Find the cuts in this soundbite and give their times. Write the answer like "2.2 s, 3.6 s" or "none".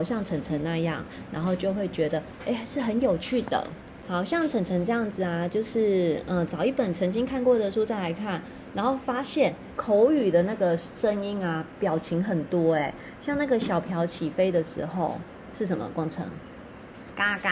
9.7 s